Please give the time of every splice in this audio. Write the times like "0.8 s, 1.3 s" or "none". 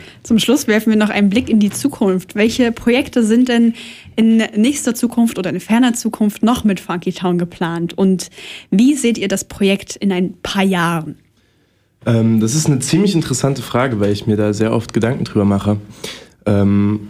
none